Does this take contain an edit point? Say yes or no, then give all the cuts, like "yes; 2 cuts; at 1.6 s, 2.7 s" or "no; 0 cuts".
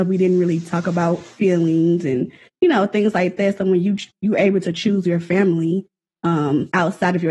no; 0 cuts